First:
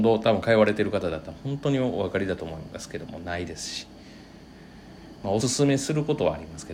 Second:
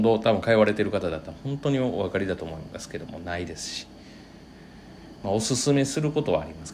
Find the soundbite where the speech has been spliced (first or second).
first